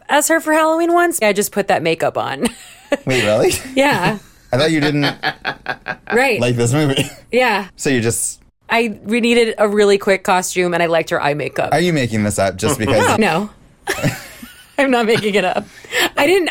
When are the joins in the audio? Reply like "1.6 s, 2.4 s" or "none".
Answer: 1.2 s, 13.2 s

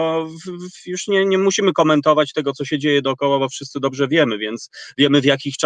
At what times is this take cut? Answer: none

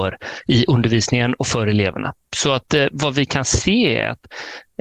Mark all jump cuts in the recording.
none

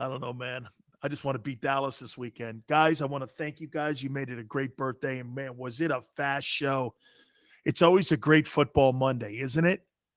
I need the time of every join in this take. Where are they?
none

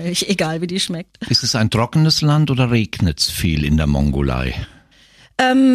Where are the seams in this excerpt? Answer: none

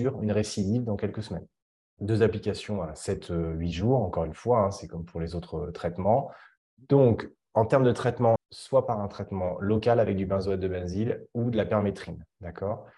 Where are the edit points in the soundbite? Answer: 1.8 s, 6.6 s, 8.4 s

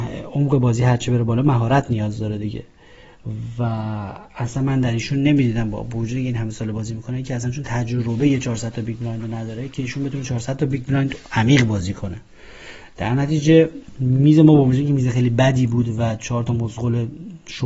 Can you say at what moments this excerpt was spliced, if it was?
none

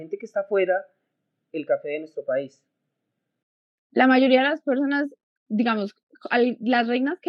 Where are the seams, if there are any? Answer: none

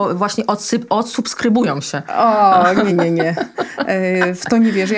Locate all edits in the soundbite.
2.9 s

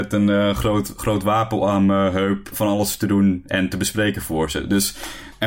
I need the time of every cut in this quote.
2.5 s

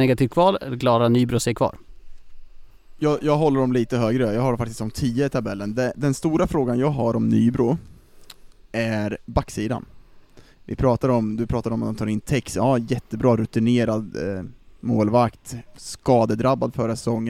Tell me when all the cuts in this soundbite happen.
5.9 s

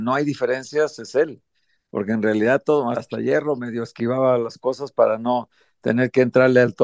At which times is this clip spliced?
2.9 s

